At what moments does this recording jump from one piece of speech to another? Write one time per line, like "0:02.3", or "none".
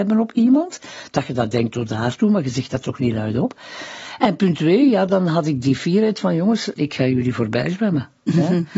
0:06.7